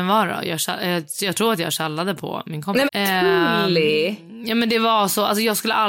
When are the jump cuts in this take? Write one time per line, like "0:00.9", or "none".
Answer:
0:02.9